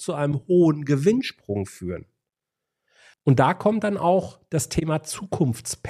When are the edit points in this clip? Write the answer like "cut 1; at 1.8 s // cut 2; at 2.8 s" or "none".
cut 1; at 3.1 s

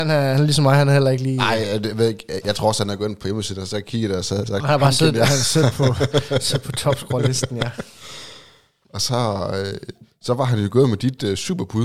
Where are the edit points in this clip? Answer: none

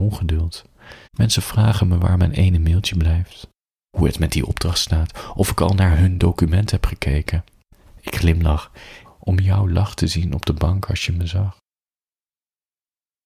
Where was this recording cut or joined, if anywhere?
cut 1; at 1.0 s // cut 2; at 9.0 s

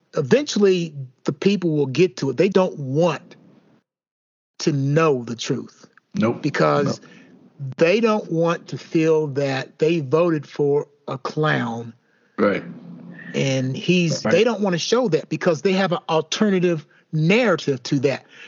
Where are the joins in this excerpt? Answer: cut 1; at 2.5 s // cut 2; at 14.2 s

